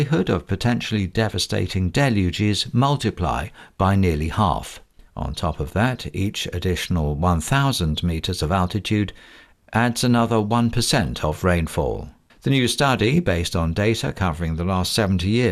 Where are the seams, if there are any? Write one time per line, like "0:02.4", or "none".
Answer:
0:05.1
0:12.3